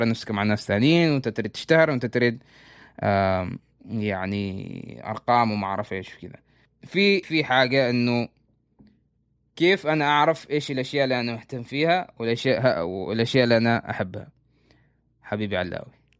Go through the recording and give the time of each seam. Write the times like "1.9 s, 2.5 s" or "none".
7.2 s